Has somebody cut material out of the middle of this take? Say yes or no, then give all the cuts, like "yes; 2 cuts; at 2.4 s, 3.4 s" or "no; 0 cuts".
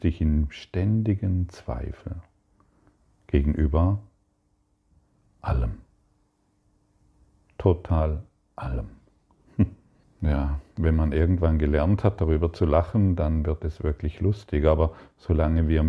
yes; 1 cut; at 10.0 s